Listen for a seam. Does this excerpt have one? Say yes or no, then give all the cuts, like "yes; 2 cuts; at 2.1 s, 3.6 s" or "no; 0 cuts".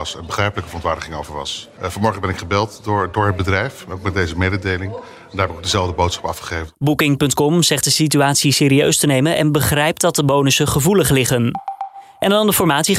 no; 0 cuts